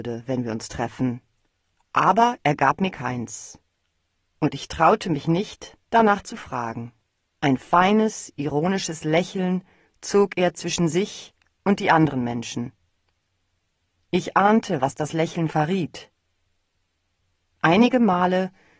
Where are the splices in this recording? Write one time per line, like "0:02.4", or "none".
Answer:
0:07.4